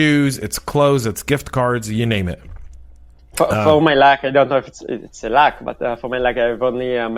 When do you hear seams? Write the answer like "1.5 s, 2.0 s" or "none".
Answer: none